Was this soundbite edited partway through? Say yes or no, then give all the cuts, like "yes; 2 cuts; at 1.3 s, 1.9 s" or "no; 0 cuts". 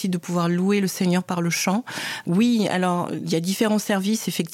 yes; 1 cut; at 2.2 s